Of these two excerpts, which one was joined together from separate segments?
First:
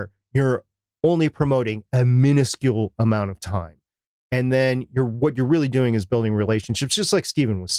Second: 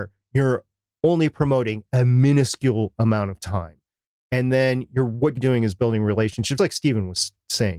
second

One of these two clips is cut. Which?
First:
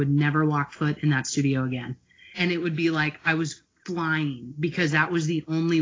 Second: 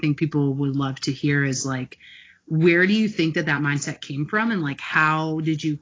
first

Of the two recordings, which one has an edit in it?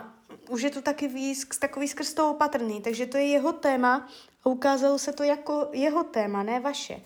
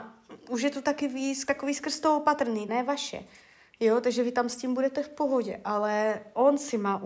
second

